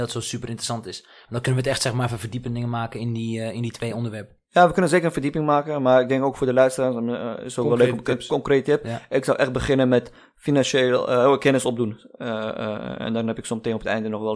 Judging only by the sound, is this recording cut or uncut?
uncut